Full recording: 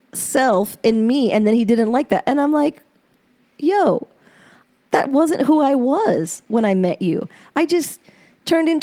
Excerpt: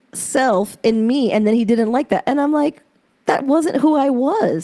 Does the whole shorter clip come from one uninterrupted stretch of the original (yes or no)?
no